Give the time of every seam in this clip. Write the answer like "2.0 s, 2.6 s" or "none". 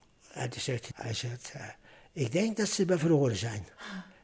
0.9 s